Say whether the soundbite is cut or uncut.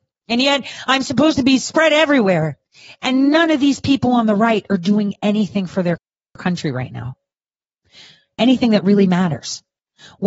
uncut